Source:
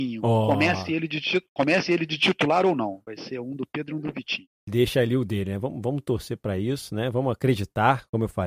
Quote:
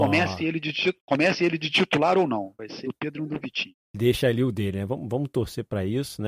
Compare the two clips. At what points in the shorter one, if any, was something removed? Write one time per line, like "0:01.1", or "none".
0:02.8